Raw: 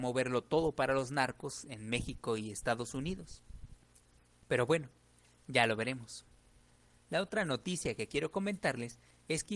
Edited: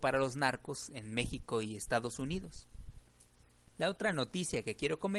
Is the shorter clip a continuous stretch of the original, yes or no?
no